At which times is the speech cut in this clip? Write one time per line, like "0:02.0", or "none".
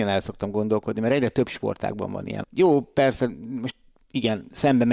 0:02.4